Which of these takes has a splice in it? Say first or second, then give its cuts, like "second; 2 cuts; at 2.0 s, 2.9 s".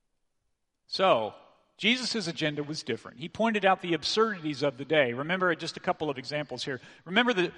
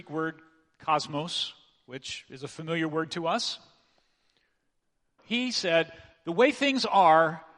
second; 1 cut; at 5.2 s